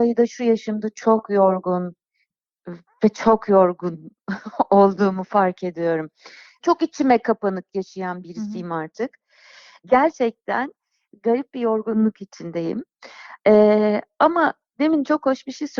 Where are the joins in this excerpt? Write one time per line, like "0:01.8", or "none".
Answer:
none